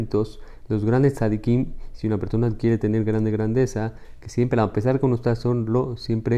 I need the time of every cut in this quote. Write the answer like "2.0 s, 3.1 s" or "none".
none